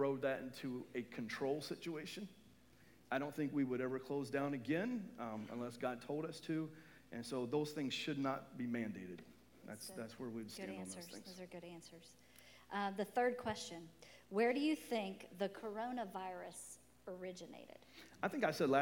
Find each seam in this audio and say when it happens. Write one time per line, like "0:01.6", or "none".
none